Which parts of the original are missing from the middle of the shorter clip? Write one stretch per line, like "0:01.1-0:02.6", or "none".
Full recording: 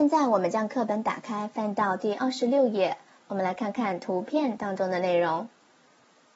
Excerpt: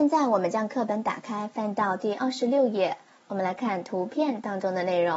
0:03.6-0:03.7